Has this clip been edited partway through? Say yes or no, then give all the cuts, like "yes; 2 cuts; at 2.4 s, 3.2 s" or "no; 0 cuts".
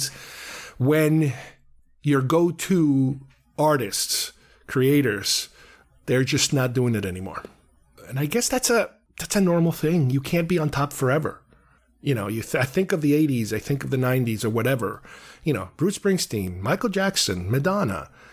no; 0 cuts